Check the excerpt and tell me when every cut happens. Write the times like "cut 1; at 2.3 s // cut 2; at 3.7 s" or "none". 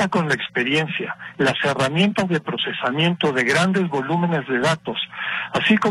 cut 1; at 1.3 s